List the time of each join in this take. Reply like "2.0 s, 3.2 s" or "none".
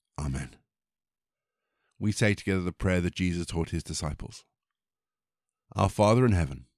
none